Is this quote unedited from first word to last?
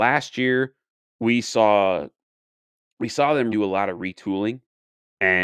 no; 1 cut; at 3.5 s

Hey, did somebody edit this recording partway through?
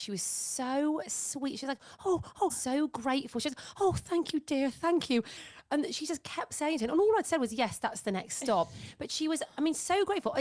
yes; 1 cut; at 2.5 s

